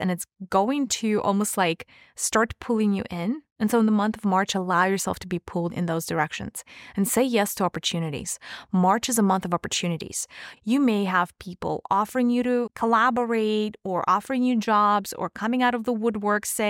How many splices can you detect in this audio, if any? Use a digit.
2